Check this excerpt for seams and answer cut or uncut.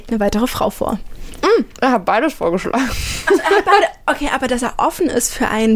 uncut